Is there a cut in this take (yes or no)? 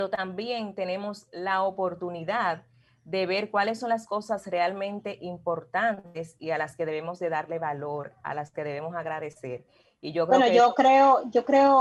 no